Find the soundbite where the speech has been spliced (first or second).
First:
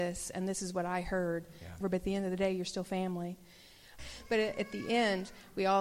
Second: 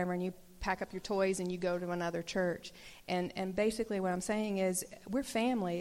first